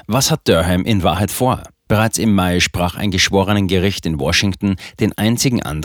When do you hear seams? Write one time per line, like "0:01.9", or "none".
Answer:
0:01.9